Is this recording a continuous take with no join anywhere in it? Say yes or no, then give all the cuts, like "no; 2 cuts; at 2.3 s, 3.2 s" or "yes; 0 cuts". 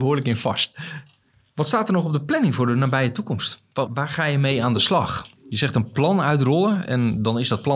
no; 1 cut; at 3.9 s